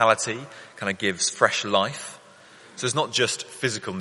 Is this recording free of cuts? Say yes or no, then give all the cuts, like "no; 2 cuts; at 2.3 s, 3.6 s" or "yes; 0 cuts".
yes; 0 cuts